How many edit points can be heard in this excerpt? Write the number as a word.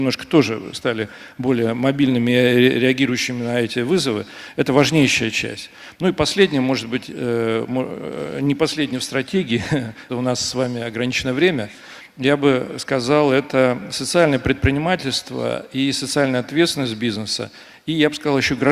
one